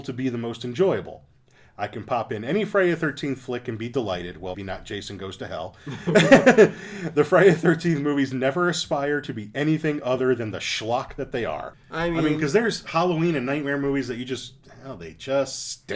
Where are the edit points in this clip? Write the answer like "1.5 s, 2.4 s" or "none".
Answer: 4.5 s, 11.7 s